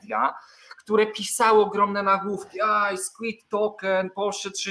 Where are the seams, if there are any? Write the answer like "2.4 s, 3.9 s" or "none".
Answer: none